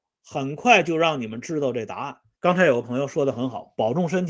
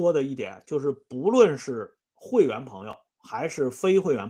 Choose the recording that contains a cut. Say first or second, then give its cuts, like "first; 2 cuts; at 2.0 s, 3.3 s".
first; 1 cut; at 2.3 s